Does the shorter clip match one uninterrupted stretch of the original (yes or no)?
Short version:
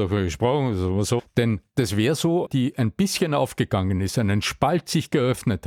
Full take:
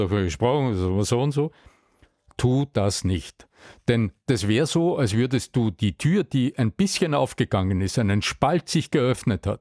no